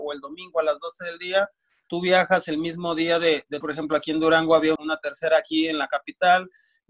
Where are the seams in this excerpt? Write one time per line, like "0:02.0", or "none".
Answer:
0:03.6
0:04.8